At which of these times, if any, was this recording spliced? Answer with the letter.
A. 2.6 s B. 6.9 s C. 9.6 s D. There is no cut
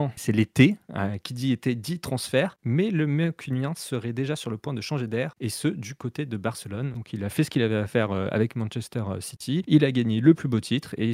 A